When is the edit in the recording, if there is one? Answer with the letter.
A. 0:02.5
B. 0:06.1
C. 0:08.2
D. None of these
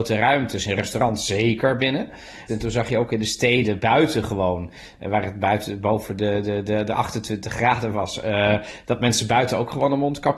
A